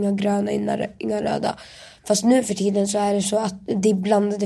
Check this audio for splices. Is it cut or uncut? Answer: uncut